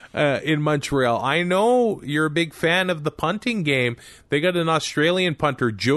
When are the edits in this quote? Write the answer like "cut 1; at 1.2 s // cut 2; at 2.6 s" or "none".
none